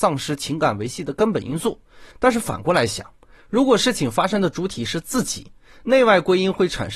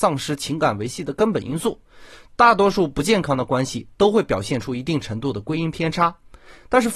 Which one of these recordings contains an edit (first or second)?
first